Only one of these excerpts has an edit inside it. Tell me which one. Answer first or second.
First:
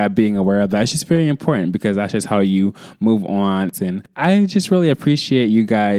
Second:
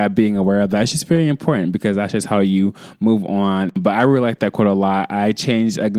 first